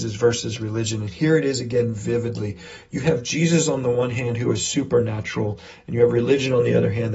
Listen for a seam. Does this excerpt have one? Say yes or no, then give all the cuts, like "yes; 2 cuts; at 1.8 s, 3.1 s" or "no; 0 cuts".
no; 0 cuts